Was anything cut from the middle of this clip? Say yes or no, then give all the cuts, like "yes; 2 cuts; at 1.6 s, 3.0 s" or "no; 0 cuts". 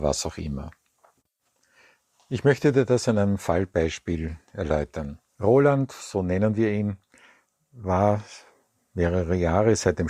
yes; 1 cut; at 5.3 s